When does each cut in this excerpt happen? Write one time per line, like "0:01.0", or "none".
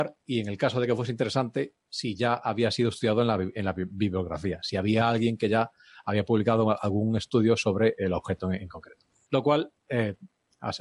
0:09.3